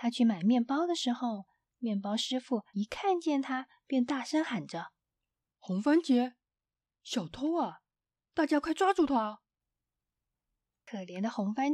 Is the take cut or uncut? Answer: uncut